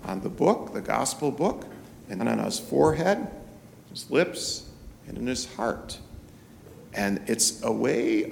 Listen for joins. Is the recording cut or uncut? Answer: cut